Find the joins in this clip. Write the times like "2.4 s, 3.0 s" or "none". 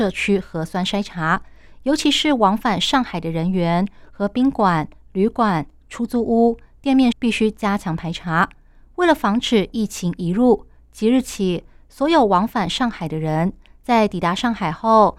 7.1 s